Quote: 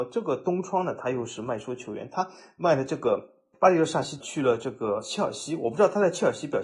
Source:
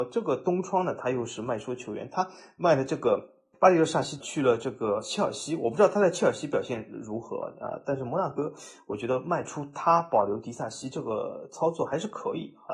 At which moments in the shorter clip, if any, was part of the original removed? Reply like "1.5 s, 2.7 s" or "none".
none